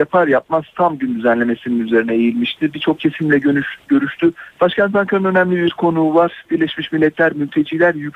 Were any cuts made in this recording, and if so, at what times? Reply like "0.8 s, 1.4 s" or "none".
4.5 s